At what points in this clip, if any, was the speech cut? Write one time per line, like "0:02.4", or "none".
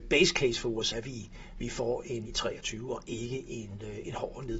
0:00.9
0:02.3